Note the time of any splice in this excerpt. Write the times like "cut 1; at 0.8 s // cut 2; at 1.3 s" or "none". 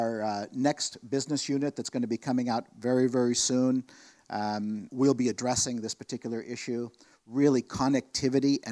cut 1; at 4.9 s